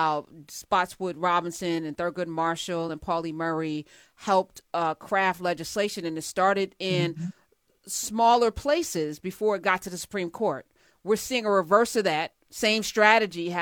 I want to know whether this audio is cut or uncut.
uncut